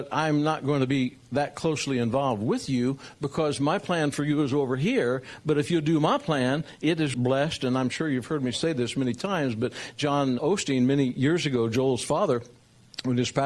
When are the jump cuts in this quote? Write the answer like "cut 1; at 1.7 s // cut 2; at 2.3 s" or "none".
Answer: cut 1; at 7.1 s // cut 2; at 10.4 s